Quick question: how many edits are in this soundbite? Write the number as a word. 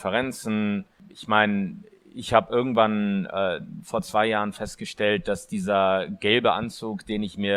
zero